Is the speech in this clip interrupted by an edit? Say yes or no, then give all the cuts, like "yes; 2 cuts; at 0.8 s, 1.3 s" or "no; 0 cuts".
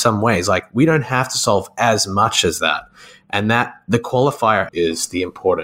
yes; 1 cut; at 4.7 s